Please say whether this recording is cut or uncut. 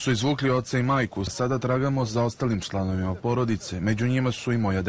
cut